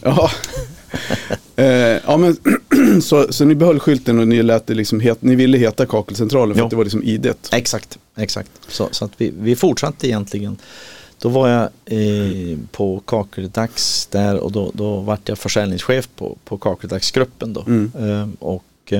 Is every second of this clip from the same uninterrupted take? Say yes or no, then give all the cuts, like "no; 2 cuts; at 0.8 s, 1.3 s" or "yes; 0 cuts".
yes; 0 cuts